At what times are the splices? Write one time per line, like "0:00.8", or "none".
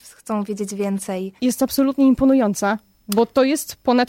0:01.4